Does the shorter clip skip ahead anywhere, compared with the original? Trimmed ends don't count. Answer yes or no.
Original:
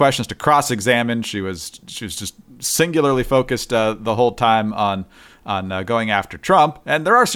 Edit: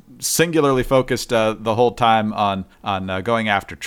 yes